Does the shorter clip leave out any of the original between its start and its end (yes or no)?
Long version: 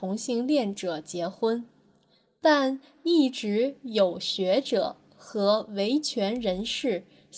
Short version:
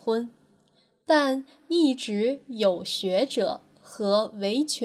no